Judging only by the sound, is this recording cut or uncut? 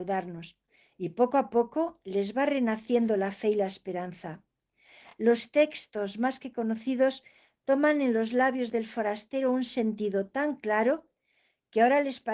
uncut